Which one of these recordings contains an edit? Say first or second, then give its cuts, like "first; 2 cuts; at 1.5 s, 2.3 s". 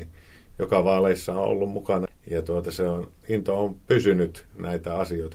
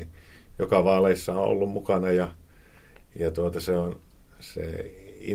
first; 2 cuts; at 2.1 s, 3.2 s